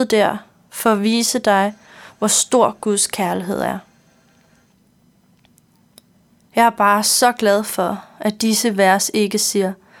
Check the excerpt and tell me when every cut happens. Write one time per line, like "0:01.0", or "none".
0:06.5